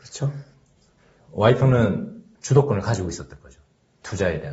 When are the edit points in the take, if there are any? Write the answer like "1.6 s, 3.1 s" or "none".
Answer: none

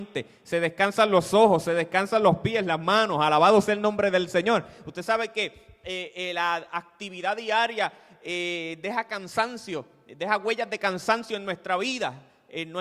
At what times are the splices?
none

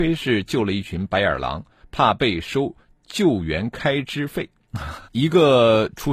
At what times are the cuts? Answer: 1.8 s, 5.1 s

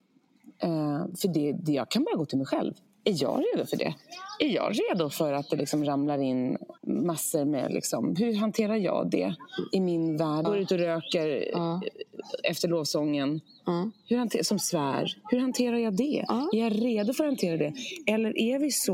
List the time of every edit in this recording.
6.8 s, 10.4 s

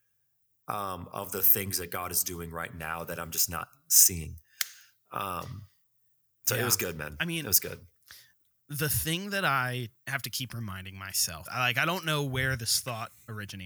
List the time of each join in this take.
11.5 s

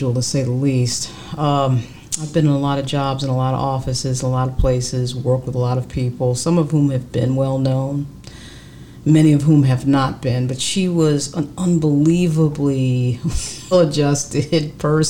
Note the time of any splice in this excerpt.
13.7 s

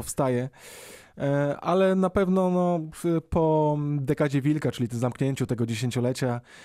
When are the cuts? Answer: none

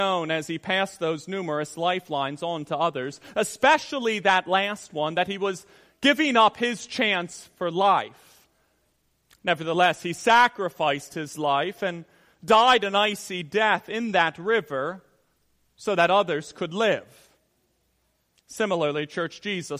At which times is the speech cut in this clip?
none

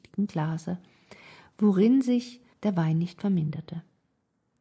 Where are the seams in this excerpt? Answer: 2.5 s

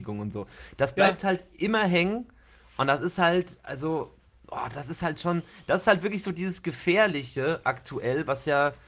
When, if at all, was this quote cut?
none

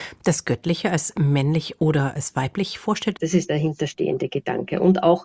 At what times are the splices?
3.1 s

